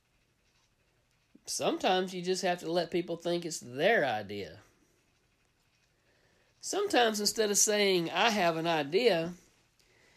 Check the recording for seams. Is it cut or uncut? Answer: uncut